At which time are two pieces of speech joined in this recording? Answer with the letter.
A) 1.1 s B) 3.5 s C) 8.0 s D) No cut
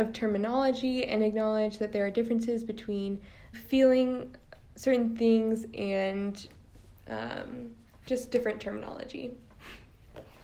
B